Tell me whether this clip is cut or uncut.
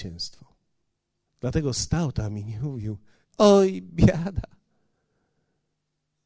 cut